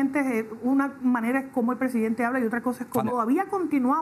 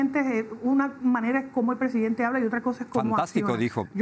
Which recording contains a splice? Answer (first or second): first